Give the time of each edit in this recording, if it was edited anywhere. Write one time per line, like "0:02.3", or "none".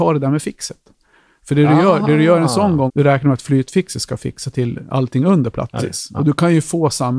0:02.9
0:05.8